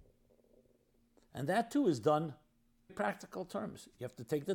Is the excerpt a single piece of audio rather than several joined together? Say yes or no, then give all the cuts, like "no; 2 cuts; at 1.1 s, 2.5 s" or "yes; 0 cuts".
no; 1 cut; at 2.9 s